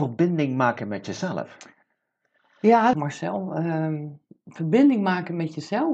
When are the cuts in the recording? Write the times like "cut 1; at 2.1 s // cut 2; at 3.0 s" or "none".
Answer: cut 1; at 2.9 s